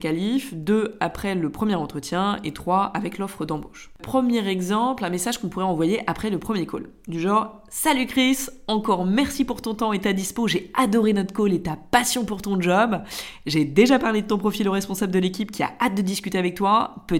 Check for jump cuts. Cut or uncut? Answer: uncut